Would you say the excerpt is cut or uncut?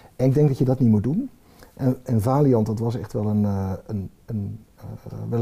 uncut